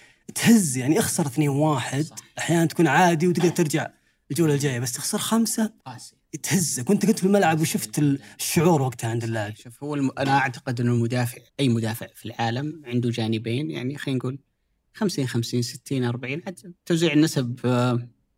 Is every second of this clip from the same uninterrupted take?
no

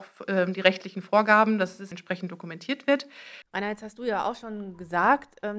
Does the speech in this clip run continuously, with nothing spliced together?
no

